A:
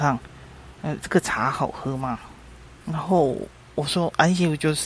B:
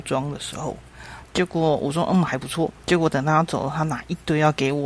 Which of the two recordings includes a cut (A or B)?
B